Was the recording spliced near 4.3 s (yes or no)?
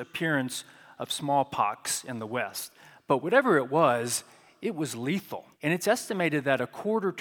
no